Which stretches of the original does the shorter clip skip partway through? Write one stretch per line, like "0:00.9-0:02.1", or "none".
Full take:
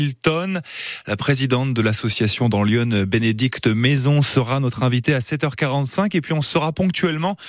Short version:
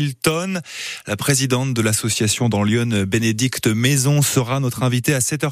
none